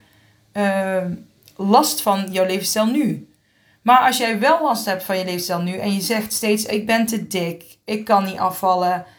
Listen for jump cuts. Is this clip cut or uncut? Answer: uncut